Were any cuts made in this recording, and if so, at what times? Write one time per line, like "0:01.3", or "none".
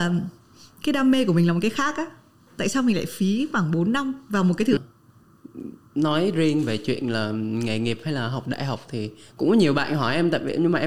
0:04.8